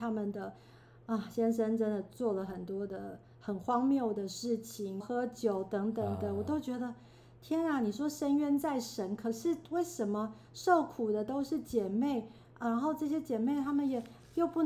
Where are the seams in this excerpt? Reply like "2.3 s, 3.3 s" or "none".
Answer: 5.0 s